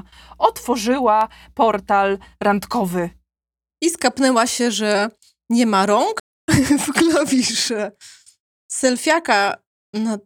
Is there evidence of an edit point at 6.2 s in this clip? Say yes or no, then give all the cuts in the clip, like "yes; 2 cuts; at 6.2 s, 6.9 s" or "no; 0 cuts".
yes; 1 cut; at 6.2 s